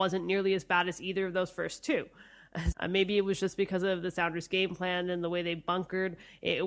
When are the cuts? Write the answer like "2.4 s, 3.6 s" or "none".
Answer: 2.7 s